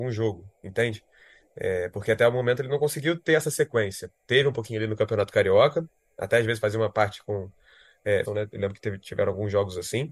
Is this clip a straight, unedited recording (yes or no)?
no